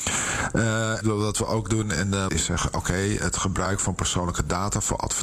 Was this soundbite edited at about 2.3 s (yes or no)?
yes